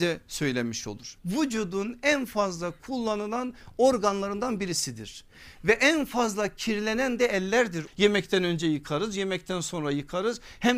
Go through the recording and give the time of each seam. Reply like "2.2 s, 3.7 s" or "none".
1.2 s, 7.9 s